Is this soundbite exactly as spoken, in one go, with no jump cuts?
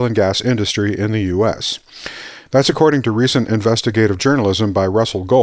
no; 1 cut; at 2.5 s

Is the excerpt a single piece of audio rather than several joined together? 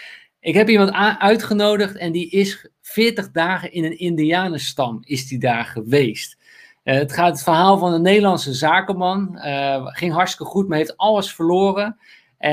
yes; 0 cuts

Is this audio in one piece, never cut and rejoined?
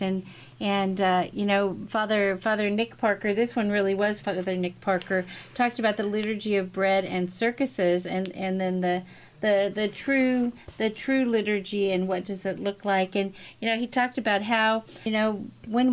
yes; 0 cuts

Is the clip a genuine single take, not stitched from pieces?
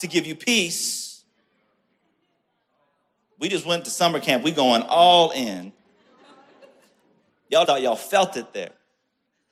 no; 1 cut; at 7.6 s

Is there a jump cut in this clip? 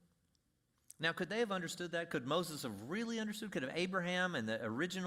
no; 0 cuts

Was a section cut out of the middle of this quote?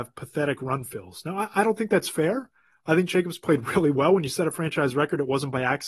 no; 0 cuts

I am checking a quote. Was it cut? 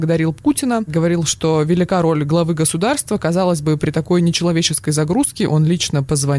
no; 0 cuts

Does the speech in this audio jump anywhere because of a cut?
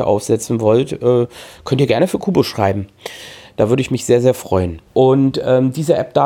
yes; 1 cut; at 4.9 s

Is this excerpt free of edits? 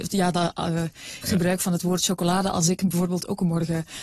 no; 1 cut; at 1.2 s

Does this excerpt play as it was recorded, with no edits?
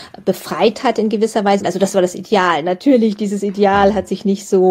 no; 1 cut; at 1.6 s

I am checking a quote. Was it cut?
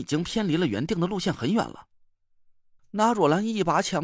yes; 1 cut; at 2.8 s

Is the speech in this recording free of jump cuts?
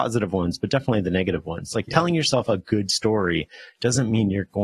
yes; 0 cuts

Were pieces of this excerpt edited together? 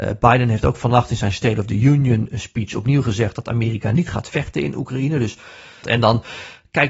yes; 1 cut; at 5.8 s

